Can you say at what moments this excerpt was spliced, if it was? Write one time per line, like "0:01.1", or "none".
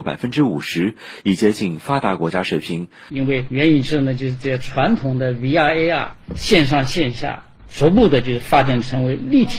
0:03.1